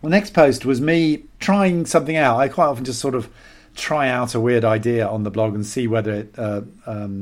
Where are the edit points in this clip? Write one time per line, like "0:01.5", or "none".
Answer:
0:01.3